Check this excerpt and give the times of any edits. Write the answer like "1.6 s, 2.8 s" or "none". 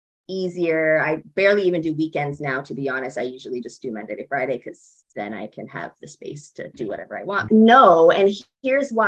7.5 s